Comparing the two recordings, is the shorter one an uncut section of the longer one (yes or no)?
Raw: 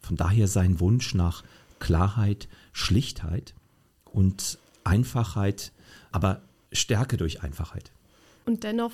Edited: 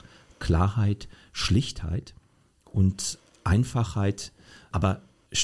yes